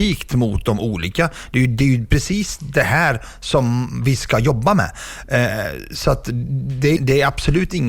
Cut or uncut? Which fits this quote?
cut